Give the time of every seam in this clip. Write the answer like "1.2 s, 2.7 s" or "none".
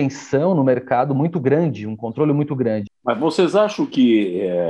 2.9 s